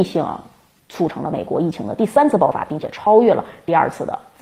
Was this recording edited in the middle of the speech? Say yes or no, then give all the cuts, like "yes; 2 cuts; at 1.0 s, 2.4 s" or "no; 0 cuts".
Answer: no; 0 cuts